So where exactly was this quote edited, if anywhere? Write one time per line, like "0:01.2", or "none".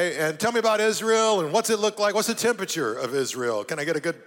none